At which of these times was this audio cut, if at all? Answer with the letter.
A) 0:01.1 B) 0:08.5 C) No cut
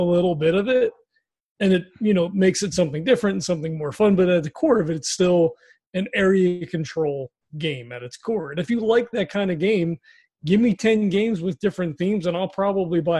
C